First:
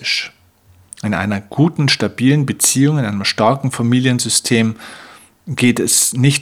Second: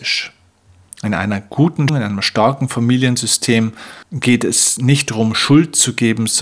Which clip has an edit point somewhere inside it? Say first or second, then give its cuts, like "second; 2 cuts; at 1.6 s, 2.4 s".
second; 2 cuts; at 1.9 s, 4.0 s